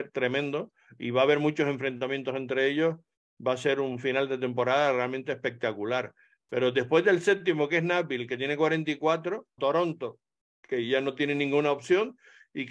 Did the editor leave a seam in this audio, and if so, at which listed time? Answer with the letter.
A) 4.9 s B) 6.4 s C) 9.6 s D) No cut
C